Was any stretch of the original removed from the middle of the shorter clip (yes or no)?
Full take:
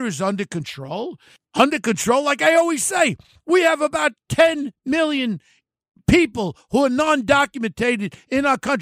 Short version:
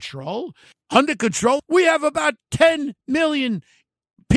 yes